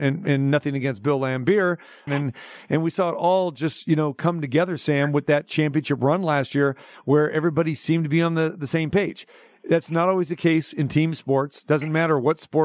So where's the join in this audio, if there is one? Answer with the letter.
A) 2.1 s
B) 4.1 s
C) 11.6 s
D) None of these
A